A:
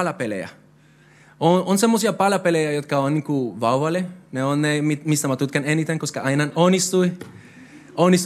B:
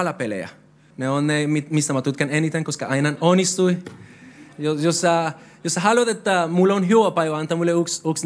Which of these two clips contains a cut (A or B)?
B